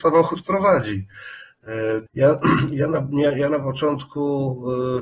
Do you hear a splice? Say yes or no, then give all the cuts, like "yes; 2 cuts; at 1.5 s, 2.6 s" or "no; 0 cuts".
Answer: yes; 1 cut; at 2.1 s